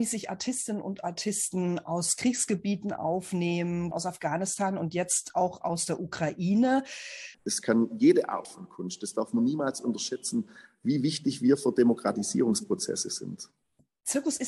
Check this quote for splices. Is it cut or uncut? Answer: cut